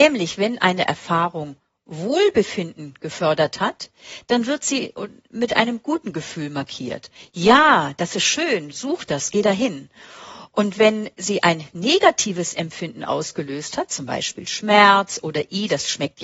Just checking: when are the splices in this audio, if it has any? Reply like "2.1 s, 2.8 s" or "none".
none